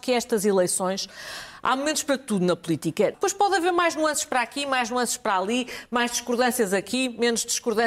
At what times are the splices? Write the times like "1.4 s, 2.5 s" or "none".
3.1 s

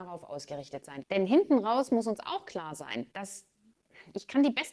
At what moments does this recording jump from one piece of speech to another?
1.0 s, 3.1 s

